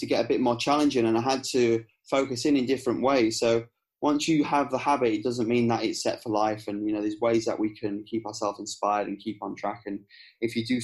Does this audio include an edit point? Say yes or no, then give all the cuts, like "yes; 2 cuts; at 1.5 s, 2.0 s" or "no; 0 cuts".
no; 0 cuts